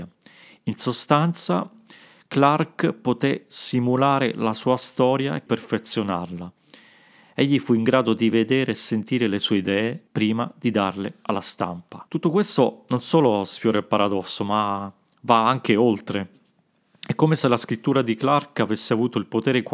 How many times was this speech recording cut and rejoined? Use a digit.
3